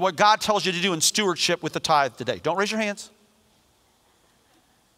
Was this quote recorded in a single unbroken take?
yes; 0 cuts

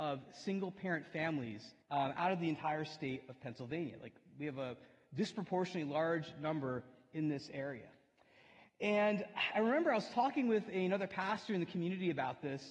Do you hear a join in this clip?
yes; 1 cut; at 1.8 s

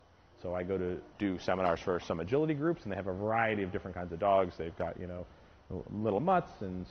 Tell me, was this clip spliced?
yes; 1 cut; at 1.1 s

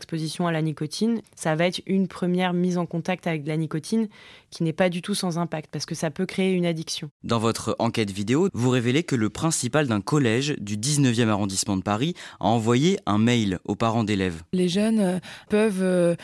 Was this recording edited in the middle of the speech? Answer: yes; 3 cuts; at 1.2 s, 8.5 s, 14.5 s

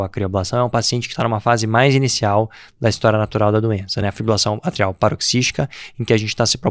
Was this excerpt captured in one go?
yes; 0 cuts

